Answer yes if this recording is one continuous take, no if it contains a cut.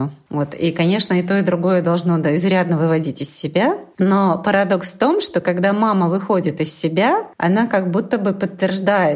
no